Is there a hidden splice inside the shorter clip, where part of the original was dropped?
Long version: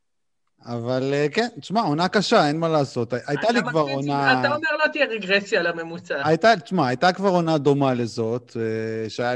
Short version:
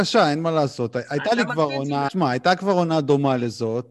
yes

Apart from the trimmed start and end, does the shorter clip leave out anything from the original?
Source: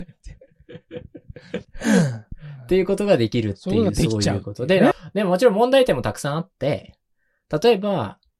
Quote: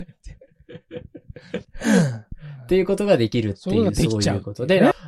no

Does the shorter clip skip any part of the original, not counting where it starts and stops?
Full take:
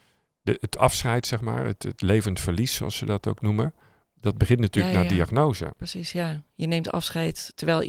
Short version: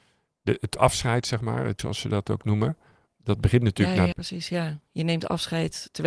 yes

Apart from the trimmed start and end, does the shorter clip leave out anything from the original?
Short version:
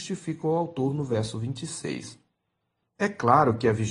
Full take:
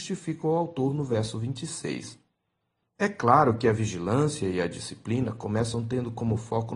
no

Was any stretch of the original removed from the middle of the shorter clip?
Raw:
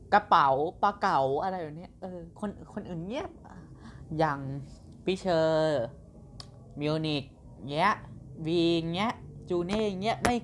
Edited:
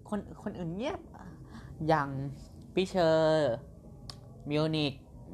no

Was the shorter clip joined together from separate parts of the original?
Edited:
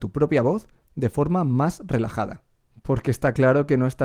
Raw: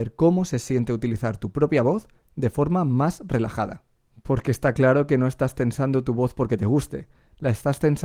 no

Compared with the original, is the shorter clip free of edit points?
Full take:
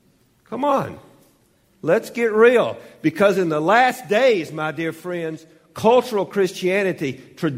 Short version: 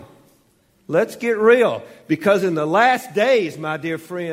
yes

